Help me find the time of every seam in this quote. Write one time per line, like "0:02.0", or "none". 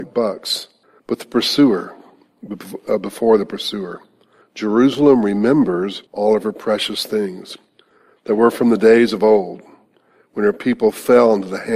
0:01.0
0:04.4
0:06.1